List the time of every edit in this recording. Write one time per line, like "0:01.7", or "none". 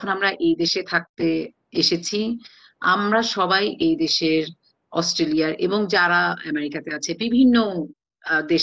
none